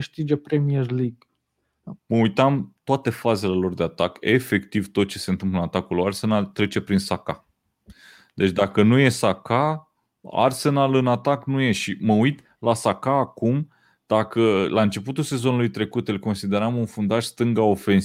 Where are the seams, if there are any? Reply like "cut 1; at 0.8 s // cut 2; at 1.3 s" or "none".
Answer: cut 1; at 2.0 s